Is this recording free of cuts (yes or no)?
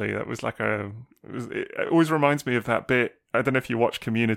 yes